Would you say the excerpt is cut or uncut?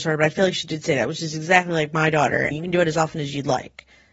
cut